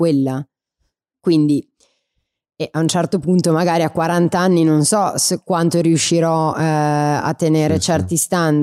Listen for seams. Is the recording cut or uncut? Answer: cut